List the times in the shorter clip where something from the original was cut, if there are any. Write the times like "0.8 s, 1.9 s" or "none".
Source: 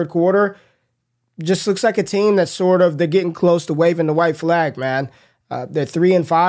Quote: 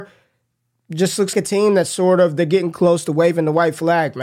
1.3 s

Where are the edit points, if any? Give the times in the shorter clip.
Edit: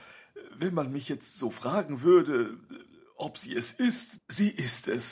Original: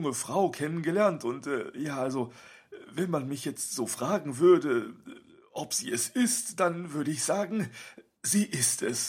4.2 s

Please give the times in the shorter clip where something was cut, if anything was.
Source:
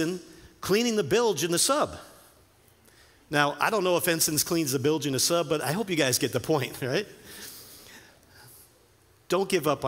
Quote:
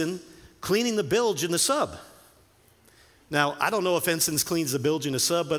none

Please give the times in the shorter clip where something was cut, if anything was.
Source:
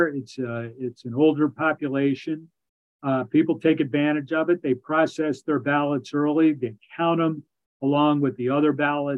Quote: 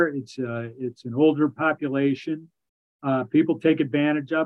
none

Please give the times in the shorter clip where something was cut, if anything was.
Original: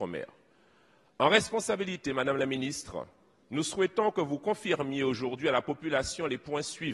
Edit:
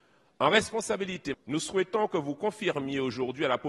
1.3 s

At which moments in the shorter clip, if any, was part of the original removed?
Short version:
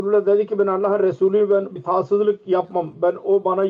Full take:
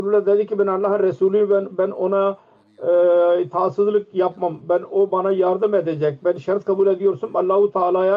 1.8 s

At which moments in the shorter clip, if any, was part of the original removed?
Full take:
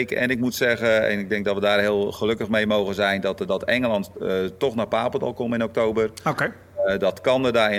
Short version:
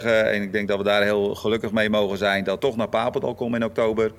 2.6 s

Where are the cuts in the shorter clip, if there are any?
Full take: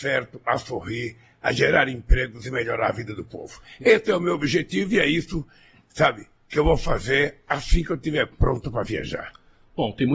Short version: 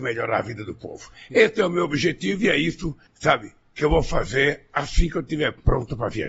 3.1 s

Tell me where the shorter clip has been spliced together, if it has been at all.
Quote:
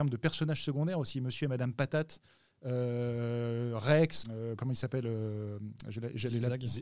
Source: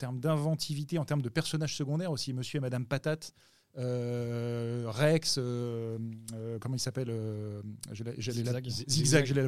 4.2 s

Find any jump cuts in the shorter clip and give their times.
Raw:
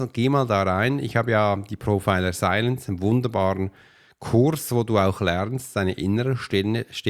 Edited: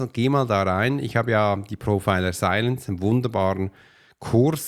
none

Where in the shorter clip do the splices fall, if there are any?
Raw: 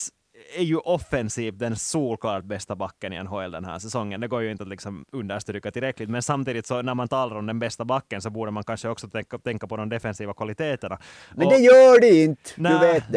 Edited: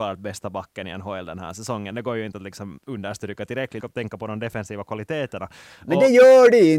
3.8 s

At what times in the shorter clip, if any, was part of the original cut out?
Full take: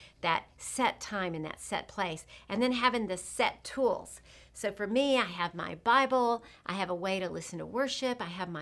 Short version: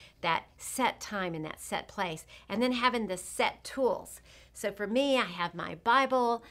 none

